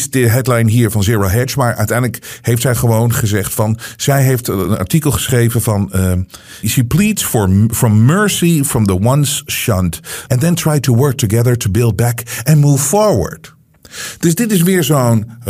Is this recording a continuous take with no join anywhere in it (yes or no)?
no